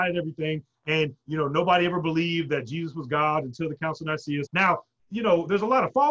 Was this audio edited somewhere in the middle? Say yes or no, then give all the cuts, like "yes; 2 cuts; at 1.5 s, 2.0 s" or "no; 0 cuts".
yes; 1 cut; at 4.5 s